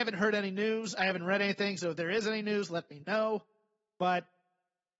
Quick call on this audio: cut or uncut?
uncut